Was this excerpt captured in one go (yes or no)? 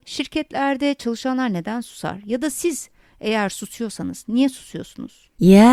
yes